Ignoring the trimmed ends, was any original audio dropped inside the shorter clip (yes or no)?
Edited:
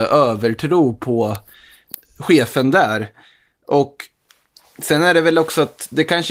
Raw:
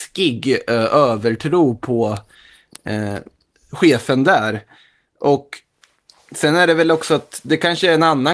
yes